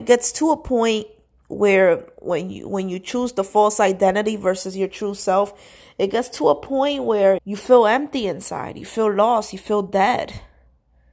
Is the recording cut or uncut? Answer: cut